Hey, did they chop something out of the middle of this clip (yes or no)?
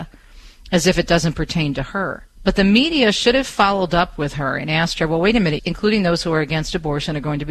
yes